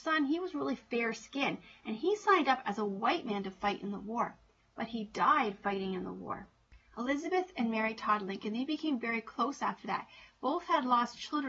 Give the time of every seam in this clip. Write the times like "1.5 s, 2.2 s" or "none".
none